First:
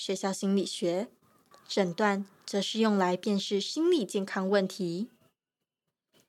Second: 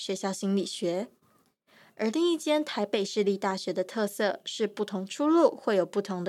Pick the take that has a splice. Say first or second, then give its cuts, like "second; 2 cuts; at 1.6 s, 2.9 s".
first; 1 cut; at 1.5 s